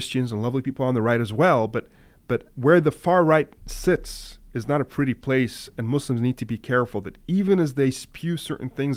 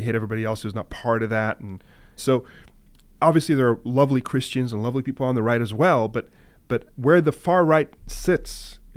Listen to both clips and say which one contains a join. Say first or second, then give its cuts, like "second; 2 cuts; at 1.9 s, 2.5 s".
second; 1 cut; at 2.2 s